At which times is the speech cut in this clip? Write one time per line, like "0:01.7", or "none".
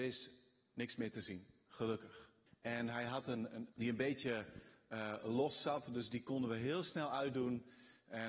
0:02.5
0:03.7